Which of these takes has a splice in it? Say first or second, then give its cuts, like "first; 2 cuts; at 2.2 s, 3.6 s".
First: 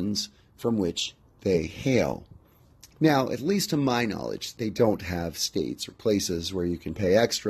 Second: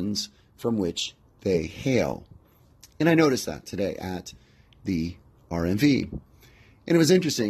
first; 2 cuts; at 2.9 s, 4.6 s